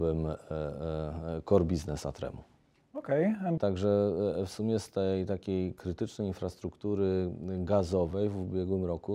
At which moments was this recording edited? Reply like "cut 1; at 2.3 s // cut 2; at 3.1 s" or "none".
cut 1; at 3.6 s